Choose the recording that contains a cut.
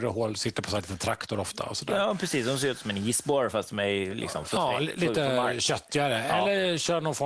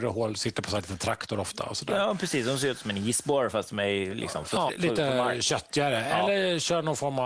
second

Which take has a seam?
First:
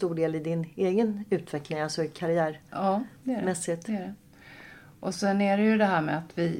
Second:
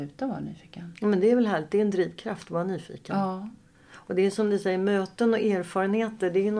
second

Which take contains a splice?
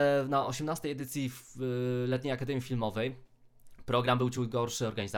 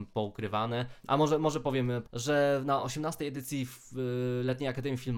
second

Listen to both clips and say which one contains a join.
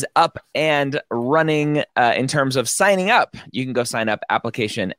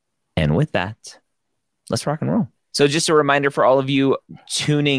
second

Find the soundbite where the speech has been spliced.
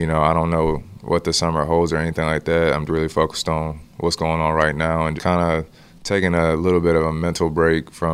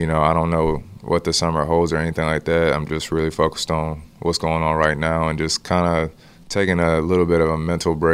first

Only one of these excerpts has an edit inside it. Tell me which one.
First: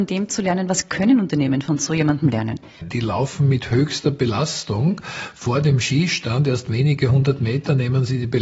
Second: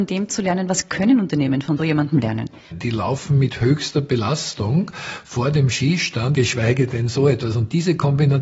second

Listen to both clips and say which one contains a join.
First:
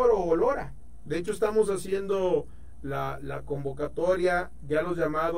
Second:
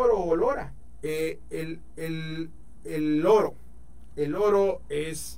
second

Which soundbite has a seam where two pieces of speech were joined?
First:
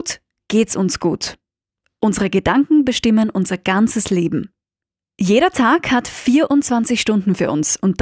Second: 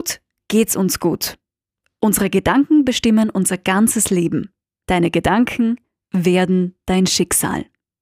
second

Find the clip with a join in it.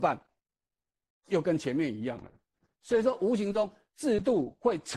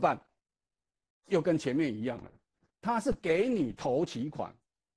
second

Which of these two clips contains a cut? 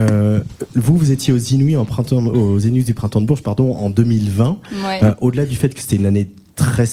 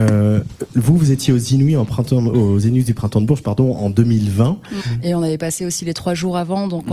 second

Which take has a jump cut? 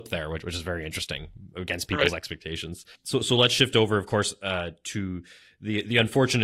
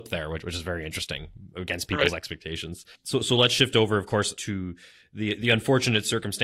second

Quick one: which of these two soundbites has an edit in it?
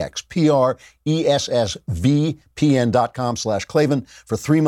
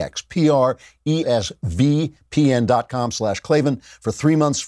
second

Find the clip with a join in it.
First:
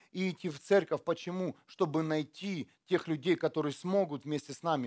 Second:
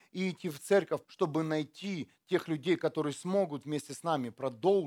second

